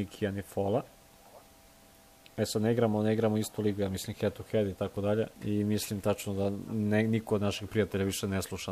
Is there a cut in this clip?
yes; 1 cut; at 5.3 s

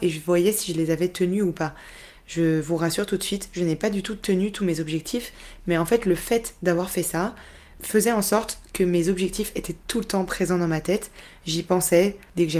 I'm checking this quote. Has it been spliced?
no; 0 cuts

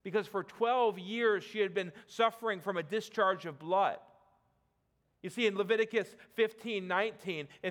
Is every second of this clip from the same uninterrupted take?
no; 1 cut; at 5.0 s

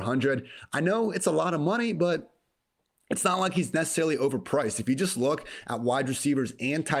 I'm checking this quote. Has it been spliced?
no; 0 cuts

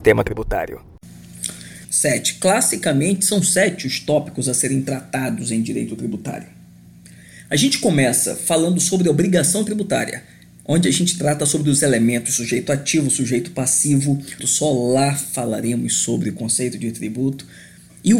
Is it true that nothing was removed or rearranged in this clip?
no; 2 cuts; at 1.8 s, 14.4 s

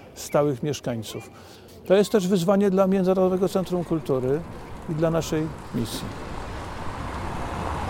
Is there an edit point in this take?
yes; 1 cut; at 1.7 s

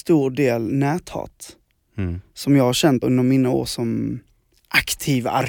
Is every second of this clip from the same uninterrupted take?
no; 1 cut; at 3.0 s

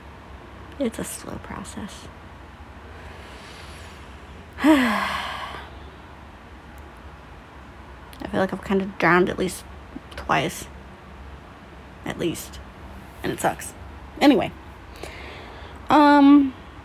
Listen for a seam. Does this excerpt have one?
no; 0 cuts

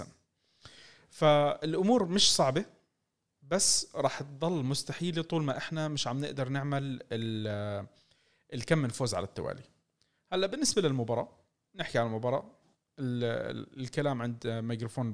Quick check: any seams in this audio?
no; 0 cuts

